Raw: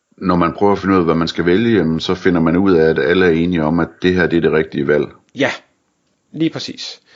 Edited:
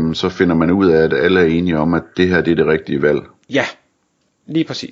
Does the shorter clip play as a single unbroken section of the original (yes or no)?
yes